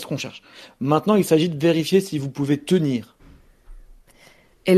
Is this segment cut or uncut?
uncut